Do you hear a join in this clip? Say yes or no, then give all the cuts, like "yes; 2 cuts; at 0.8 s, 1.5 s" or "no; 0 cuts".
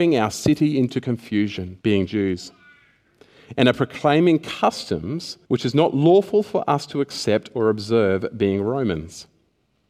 yes; 2 cuts; at 1.8 s, 5.4 s